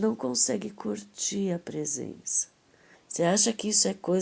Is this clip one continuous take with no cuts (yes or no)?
no